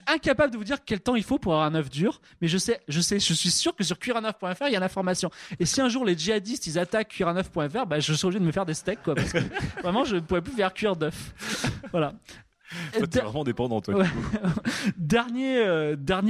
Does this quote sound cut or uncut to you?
uncut